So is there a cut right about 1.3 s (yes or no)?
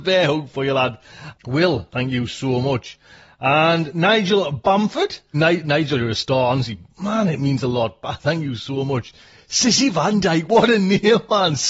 yes